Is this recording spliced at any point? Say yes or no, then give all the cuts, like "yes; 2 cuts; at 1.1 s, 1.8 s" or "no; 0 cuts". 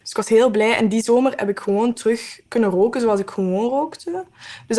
yes; 1 cut; at 2.5 s